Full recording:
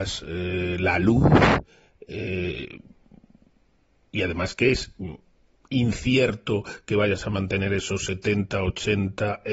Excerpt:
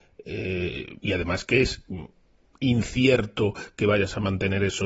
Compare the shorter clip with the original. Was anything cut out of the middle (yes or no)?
yes